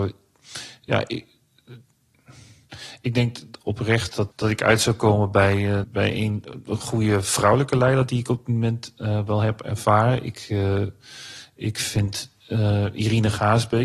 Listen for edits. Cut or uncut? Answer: cut